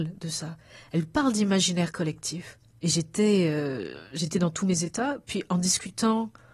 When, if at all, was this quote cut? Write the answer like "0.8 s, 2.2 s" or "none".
2.7 s